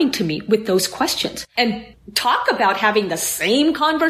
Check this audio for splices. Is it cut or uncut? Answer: cut